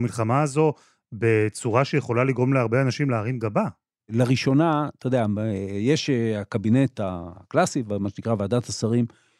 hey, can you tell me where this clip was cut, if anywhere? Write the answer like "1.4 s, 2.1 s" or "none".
4.0 s

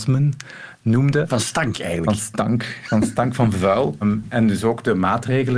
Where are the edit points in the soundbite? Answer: 4.0 s

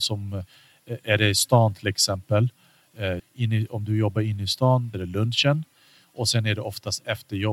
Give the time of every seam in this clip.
3.2 s, 4.9 s

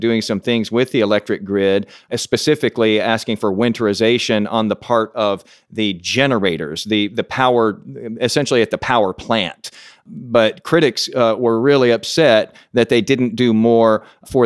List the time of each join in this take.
none

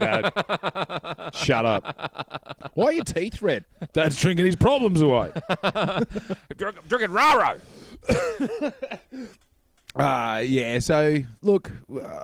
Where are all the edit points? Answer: 3.9 s

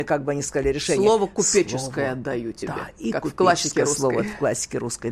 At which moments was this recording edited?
none

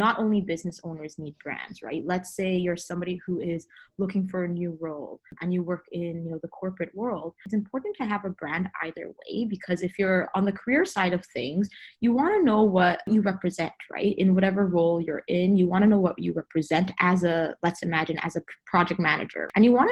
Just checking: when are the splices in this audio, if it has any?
none

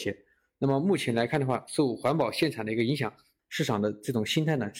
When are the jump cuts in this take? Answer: 3.4 s

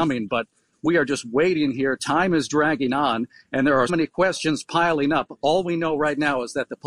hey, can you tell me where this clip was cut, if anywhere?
3.9 s

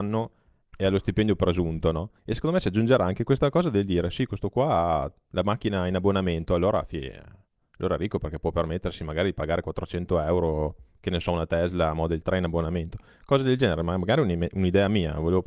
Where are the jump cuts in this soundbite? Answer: 2.2 s

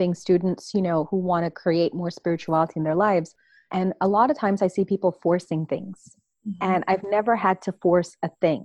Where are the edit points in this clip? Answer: none

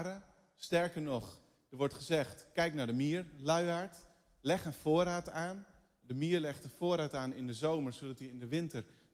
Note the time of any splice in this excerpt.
none

